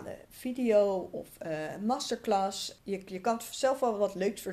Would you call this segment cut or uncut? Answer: cut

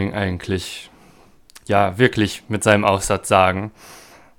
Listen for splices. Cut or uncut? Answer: uncut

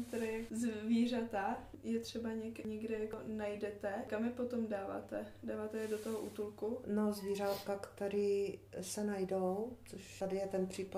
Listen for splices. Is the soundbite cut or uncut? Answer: uncut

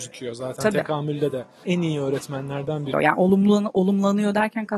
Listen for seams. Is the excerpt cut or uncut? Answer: cut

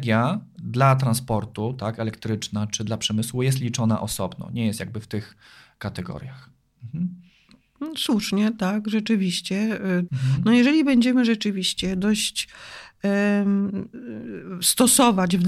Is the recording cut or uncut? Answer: cut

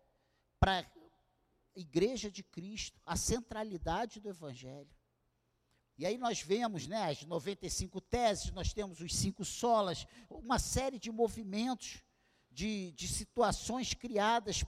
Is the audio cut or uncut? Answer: cut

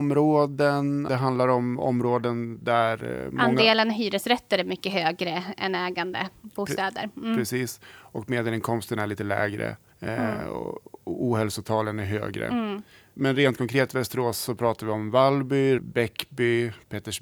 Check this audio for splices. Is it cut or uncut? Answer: cut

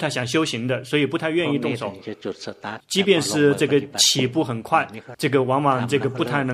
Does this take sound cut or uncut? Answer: cut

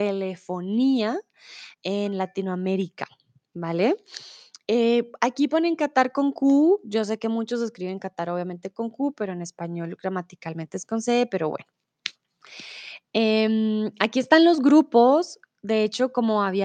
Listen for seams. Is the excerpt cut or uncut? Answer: uncut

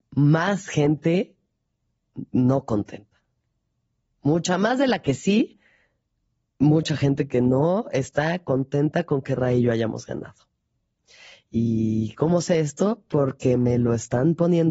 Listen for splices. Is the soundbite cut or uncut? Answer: uncut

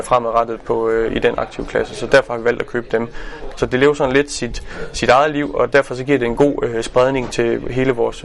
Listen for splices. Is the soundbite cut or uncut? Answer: cut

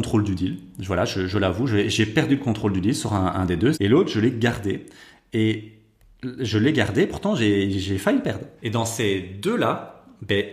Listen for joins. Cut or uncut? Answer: cut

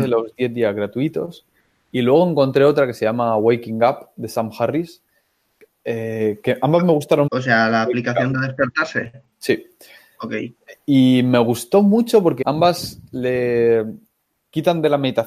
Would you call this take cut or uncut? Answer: cut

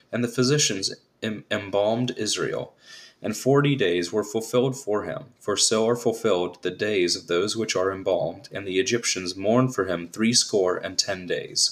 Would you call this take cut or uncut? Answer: uncut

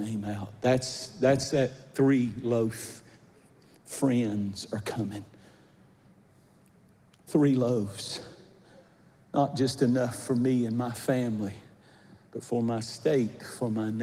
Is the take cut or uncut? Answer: cut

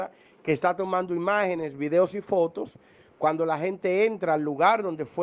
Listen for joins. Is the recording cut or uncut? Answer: uncut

